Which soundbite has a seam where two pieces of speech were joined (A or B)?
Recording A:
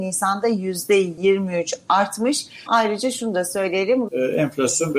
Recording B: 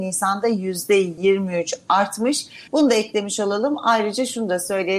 A